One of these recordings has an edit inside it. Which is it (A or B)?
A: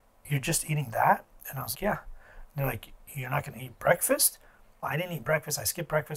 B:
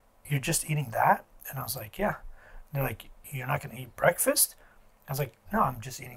A